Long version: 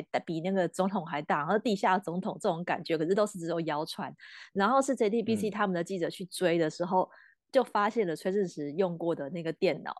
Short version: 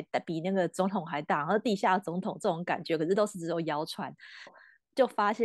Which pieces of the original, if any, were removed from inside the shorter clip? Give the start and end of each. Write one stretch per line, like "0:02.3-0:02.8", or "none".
0:04.5-0:07.0